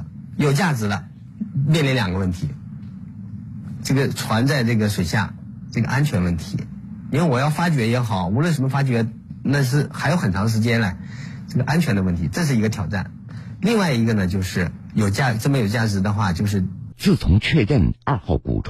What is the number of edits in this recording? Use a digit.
2